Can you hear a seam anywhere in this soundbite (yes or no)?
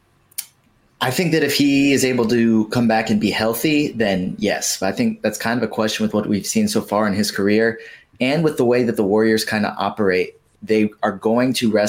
no